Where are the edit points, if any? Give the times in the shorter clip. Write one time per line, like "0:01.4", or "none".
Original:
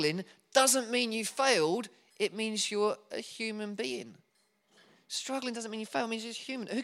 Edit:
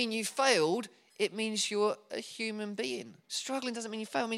0:03.2

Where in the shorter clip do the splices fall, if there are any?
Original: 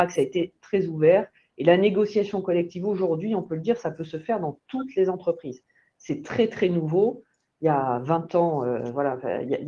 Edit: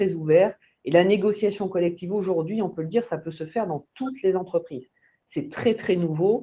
none

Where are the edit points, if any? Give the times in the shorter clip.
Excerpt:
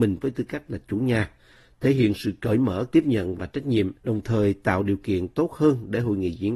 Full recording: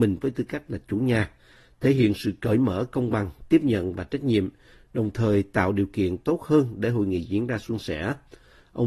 0:02.9
0:04.0

